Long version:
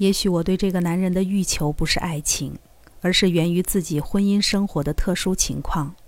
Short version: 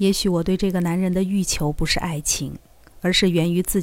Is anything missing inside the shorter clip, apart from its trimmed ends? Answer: no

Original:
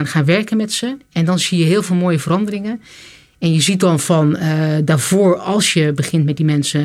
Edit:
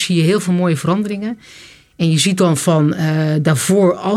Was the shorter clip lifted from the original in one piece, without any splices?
yes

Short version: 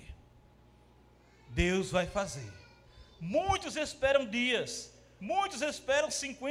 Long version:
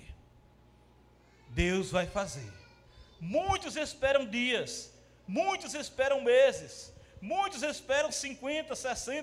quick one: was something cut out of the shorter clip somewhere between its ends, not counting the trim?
yes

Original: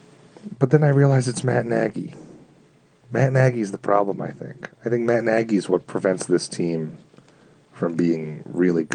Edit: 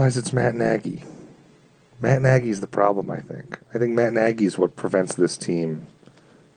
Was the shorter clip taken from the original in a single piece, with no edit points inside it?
yes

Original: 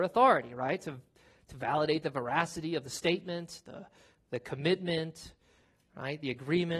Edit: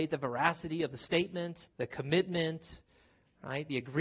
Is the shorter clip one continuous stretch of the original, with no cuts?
no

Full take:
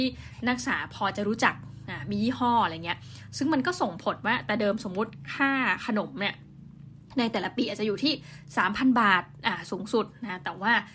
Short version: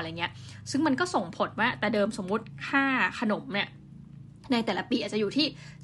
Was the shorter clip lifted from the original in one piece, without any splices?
yes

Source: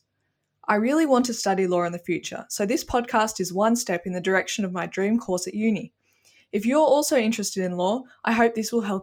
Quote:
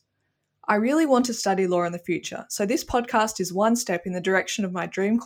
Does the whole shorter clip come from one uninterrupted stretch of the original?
yes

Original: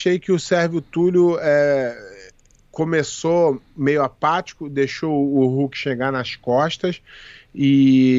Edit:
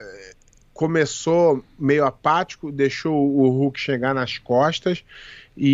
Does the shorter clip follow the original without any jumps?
yes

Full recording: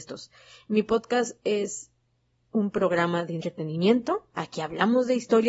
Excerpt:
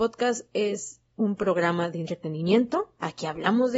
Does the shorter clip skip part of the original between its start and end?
yes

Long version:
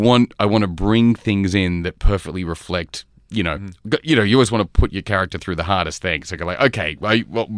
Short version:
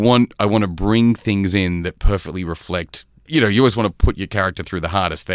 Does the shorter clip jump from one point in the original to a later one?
yes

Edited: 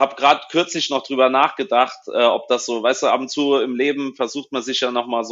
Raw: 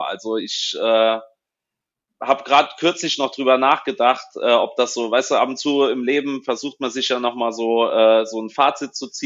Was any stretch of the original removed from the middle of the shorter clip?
no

